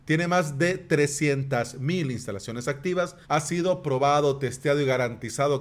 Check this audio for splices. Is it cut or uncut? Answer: cut